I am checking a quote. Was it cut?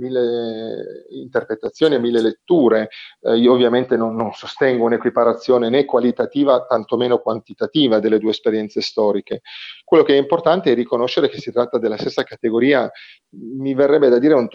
no; 0 cuts

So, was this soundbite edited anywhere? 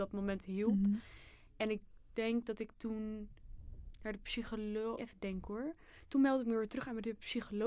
yes; 1 cut; at 5.0 s

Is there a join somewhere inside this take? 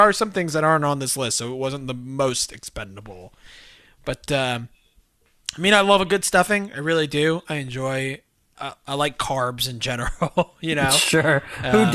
yes; 1 cut; at 8.5 s

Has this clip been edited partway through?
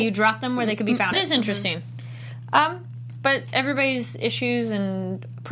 yes; 1 cut; at 1.1 s

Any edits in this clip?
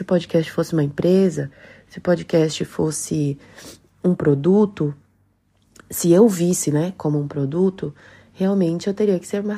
no; 0 cuts

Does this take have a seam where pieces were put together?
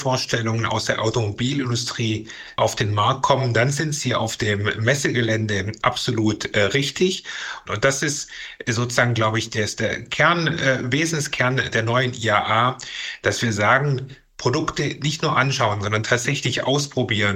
yes; 2 cuts; at 5.8 s, 7.7 s

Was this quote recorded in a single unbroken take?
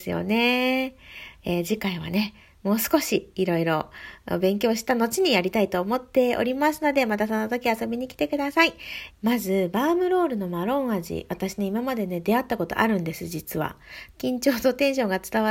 no; 2 cuts; at 9.1 s, 14.1 s

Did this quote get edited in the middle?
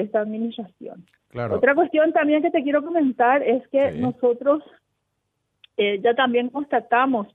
no; 0 cuts

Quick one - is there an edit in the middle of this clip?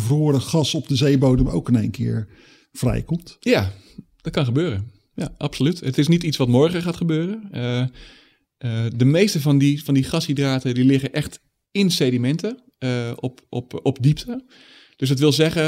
no; 0 cuts

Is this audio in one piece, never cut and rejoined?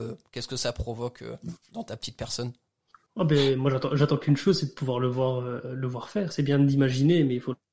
yes; 0 cuts

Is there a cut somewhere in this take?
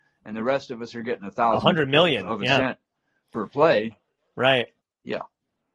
no; 0 cuts

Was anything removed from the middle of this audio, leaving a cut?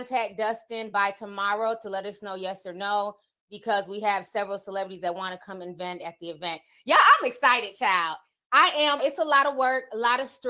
yes; 1 cut; at 9.0 s

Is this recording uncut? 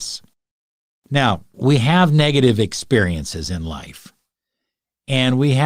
no; 1 cut; at 1.5 s

